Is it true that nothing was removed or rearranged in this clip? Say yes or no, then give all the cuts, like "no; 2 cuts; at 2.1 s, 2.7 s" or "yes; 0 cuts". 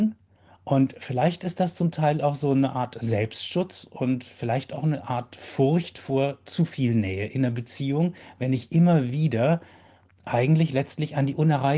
yes; 0 cuts